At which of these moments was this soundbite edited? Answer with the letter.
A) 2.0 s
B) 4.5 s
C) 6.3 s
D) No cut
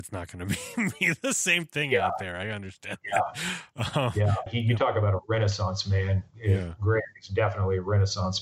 B